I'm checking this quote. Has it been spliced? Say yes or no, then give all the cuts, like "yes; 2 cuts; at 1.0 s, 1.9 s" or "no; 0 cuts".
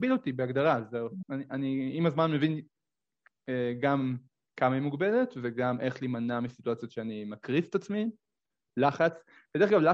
yes; 2 cuts; at 1.2 s, 8.7 s